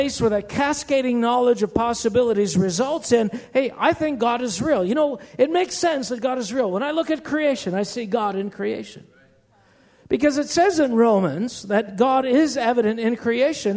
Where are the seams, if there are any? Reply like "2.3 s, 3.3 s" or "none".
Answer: none